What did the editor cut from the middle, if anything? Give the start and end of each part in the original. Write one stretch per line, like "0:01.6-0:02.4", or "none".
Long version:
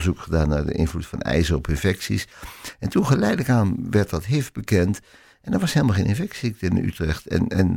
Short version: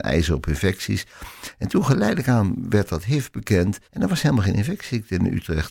0:05.1-0:05.4